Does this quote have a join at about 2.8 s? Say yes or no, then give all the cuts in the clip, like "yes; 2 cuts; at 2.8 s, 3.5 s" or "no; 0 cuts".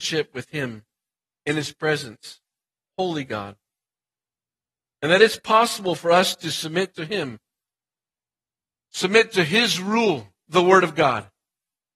yes; 2 cuts; at 2.8 s, 10.5 s